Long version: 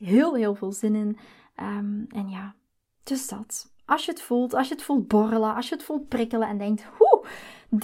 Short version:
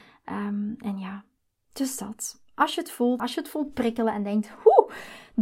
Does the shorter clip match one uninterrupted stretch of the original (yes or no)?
no